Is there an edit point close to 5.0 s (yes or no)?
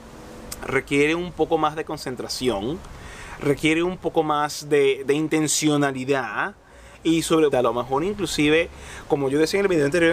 yes